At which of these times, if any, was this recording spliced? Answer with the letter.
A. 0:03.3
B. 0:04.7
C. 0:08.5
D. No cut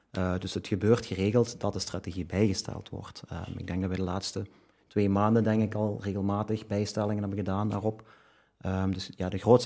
D